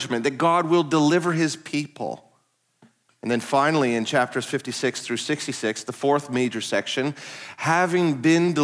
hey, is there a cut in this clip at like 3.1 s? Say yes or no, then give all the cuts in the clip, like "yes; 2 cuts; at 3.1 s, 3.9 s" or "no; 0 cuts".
yes; 1 cut; at 3.1 s